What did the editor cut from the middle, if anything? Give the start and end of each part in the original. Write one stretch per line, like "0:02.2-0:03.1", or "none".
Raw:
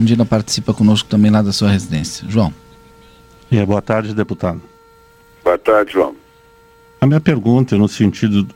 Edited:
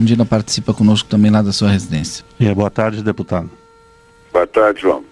0:02.2-0:03.3